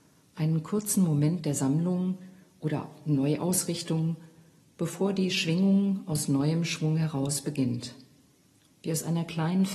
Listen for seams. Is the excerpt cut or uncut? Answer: cut